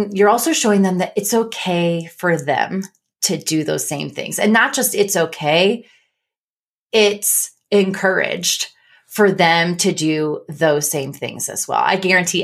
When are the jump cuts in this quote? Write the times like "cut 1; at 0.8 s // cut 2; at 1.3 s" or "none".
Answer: none